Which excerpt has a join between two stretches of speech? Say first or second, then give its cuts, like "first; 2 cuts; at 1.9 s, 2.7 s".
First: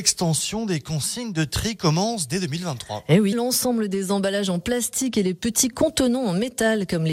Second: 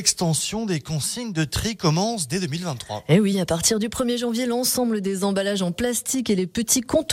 first; 1 cut; at 3.3 s